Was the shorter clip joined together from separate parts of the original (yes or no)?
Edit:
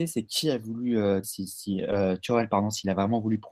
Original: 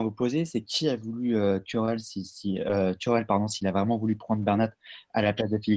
yes